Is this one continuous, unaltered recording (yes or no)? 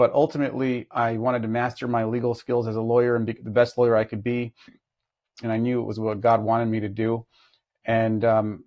no